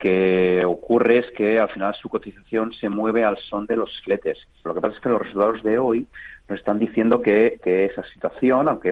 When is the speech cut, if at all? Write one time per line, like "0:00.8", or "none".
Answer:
0:04.6
0:07.6